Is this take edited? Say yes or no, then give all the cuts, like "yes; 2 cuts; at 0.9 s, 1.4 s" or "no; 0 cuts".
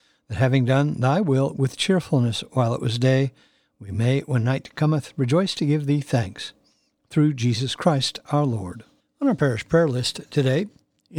yes; 1 cut; at 9.0 s